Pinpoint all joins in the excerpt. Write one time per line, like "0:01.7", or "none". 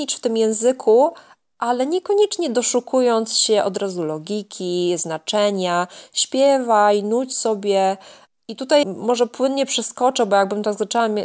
0:08.8